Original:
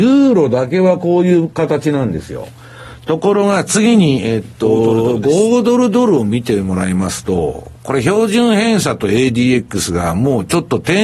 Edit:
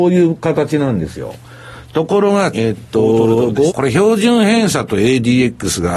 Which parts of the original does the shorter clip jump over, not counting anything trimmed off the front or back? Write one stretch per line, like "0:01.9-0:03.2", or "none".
0:03.7-0:04.2
0:05.4-0:07.8